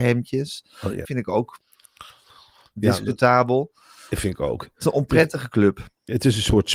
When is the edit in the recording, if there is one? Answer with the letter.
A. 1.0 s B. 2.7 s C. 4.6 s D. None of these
A